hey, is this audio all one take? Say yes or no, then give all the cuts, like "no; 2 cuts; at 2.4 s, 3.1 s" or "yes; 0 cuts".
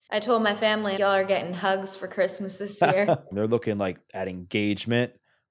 no; 2 cuts; at 1.0 s, 3.3 s